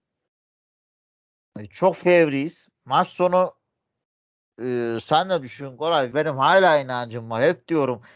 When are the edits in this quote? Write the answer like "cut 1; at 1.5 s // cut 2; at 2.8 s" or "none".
cut 1; at 6.1 s